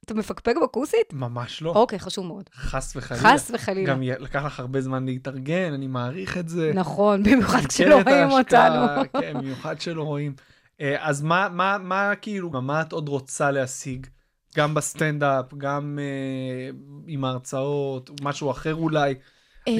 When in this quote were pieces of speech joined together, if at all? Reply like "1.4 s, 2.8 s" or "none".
12.5 s